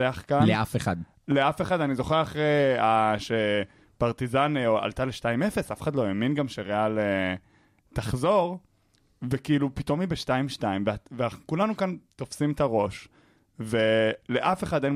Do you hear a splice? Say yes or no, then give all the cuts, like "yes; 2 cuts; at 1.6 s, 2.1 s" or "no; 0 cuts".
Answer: no; 0 cuts